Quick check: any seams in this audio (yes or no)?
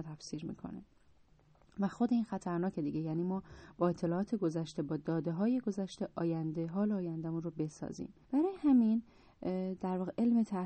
yes